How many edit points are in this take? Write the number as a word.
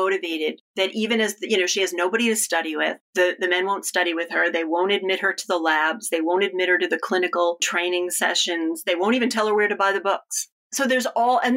zero